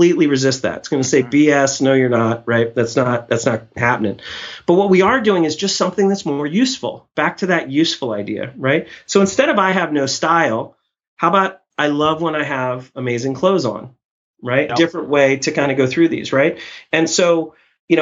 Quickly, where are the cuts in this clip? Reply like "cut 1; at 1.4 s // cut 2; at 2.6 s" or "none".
cut 1; at 14.7 s

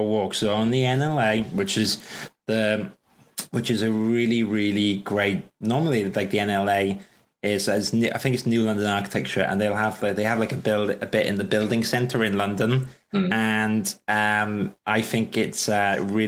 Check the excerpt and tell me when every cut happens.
none

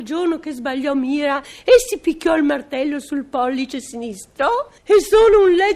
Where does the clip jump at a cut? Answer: cut 1; at 4.8 s

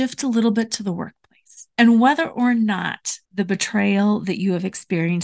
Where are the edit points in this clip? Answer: cut 1; at 1.7 s // cut 2; at 3.2 s

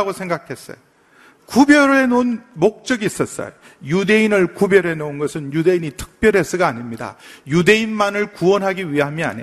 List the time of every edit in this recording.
cut 1; at 1.4 s

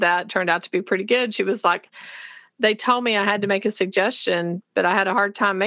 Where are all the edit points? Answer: none

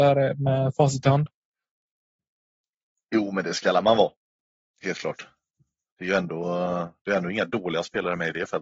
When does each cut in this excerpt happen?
none

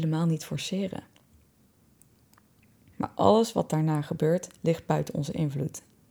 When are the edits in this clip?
cut 1; at 2.9 s

